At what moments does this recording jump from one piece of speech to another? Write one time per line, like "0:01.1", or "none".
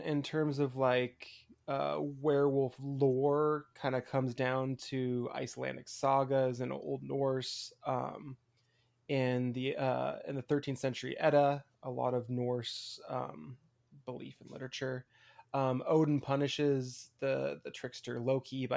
0:11.7